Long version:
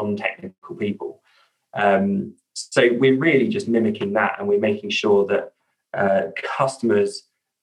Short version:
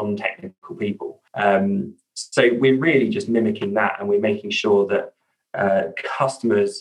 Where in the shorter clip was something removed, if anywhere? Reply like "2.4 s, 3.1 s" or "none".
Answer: 1.3 s

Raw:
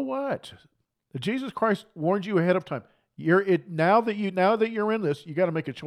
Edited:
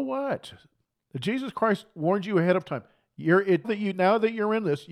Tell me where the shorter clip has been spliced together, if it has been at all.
3.6 s

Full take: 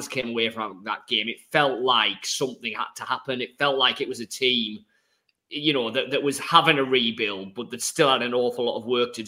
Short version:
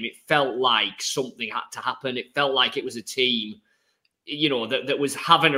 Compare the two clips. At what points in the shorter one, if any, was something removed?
none

